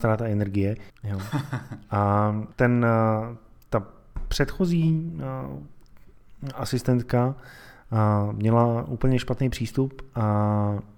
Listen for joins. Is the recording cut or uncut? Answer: cut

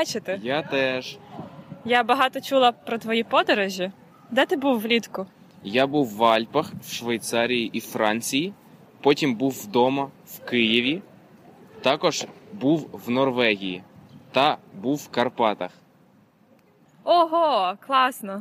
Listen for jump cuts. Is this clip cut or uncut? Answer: uncut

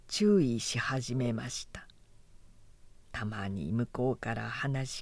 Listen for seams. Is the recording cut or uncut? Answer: uncut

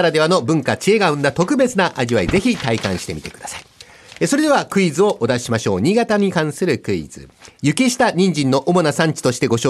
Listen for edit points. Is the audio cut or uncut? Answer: uncut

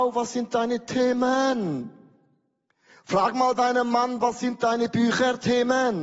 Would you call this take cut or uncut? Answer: uncut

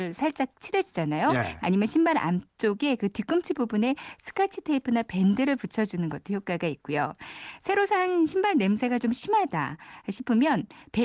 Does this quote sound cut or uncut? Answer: cut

